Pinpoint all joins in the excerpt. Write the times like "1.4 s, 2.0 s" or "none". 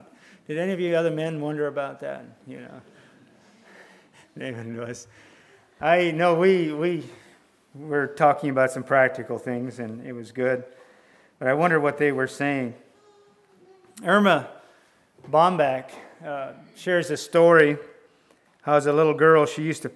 none